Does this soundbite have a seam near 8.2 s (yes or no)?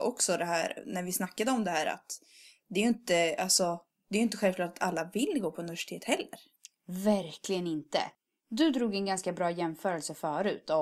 no